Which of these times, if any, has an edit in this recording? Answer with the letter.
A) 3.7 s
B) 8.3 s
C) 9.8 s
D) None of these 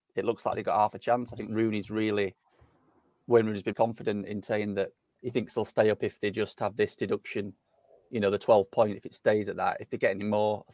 A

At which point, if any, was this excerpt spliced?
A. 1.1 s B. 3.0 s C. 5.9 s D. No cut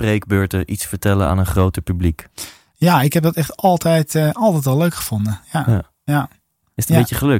D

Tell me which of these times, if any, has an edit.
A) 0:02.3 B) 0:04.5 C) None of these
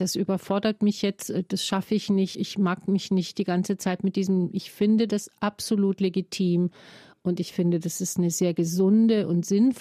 A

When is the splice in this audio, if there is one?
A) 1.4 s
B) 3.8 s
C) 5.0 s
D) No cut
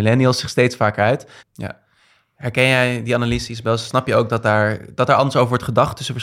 A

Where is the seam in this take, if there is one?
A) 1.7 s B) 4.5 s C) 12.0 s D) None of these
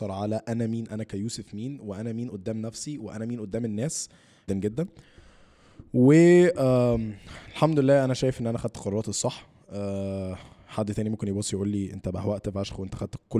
B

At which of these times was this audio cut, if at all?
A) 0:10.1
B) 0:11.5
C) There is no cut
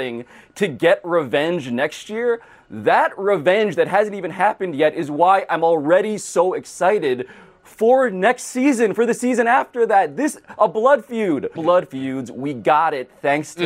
B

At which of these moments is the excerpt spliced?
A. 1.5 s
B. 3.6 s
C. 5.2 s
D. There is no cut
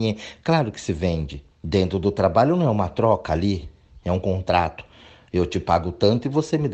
A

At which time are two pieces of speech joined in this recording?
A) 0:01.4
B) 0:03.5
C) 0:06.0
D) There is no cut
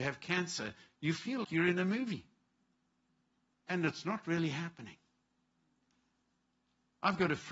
A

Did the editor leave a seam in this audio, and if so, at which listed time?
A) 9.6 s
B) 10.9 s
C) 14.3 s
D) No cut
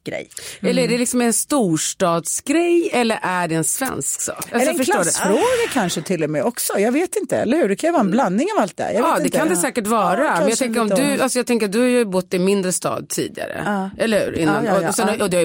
D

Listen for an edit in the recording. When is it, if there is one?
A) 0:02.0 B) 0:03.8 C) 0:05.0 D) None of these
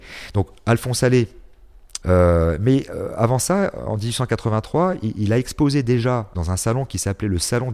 A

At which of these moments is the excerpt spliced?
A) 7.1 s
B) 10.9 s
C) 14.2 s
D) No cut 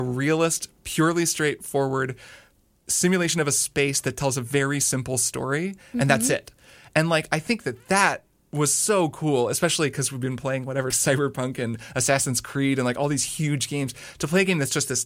B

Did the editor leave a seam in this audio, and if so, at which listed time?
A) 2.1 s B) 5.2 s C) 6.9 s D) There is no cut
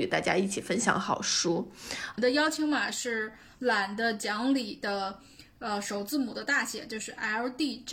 A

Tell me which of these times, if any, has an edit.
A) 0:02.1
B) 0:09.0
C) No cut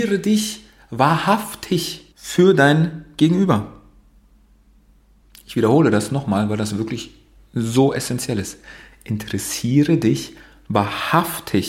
A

